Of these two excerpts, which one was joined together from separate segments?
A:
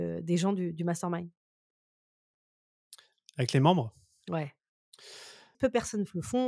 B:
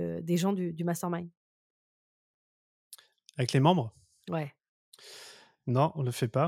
A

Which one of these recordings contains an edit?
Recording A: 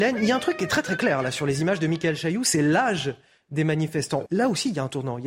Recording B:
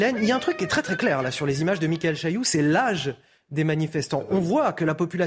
A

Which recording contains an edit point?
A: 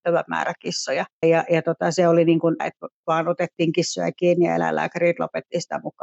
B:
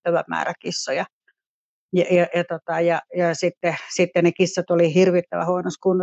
A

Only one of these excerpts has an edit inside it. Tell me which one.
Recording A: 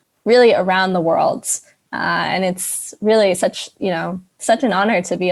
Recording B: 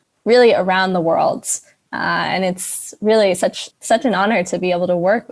B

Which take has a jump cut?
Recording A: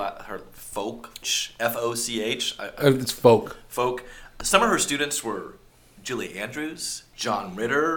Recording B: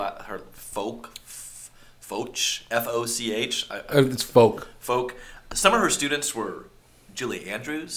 A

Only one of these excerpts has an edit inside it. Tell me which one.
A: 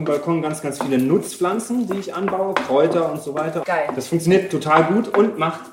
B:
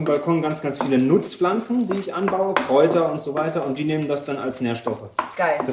A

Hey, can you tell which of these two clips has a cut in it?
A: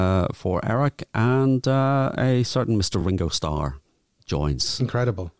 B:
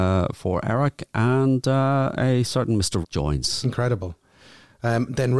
B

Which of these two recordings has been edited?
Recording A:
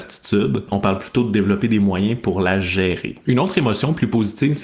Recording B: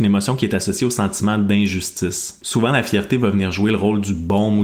B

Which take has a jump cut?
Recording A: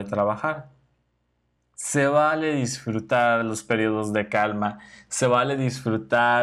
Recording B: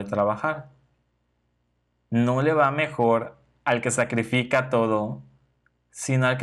A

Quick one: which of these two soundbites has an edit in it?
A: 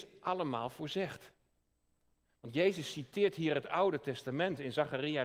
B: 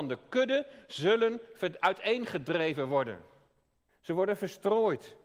B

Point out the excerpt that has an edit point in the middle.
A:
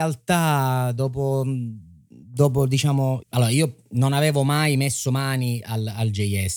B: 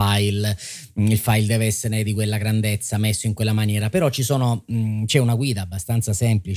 A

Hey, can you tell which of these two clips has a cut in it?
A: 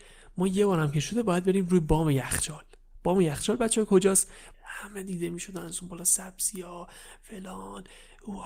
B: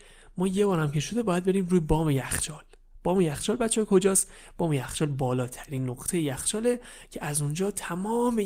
A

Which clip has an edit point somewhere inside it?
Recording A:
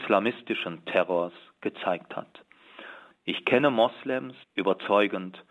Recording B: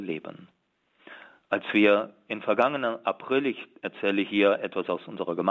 A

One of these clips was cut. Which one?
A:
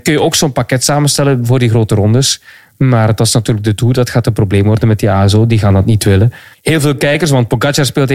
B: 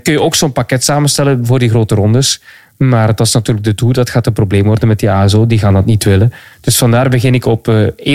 A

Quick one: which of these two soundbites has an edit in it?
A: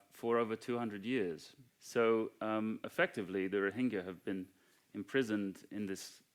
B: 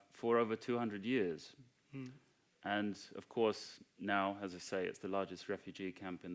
A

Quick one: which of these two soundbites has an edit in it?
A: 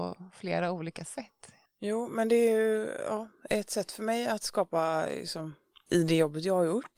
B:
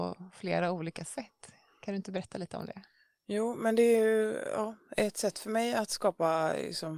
A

